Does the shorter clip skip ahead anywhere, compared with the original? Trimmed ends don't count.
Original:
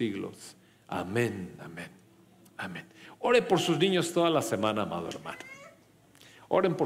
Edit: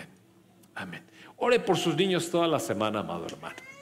no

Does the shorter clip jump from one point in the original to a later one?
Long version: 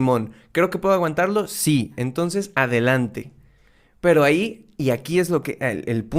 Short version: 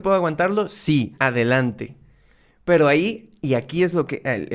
yes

